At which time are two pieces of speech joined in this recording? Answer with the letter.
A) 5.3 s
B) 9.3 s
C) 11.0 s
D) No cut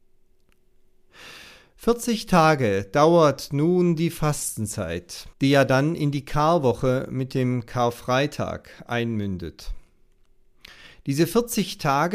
A